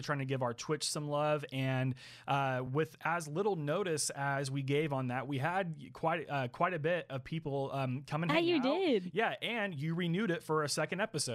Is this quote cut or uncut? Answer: uncut